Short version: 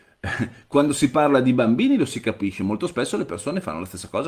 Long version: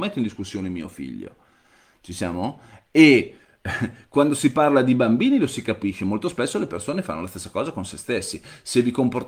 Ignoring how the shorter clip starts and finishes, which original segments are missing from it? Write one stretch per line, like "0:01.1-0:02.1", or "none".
none